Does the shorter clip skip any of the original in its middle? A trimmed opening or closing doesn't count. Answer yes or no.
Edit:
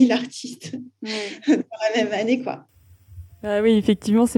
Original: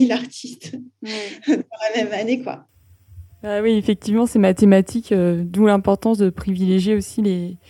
no